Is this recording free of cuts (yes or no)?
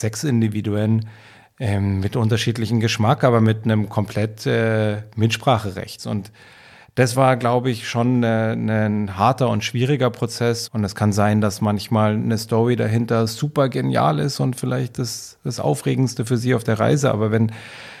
no